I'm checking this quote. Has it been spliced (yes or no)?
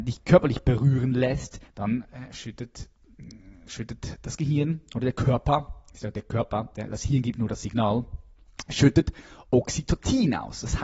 yes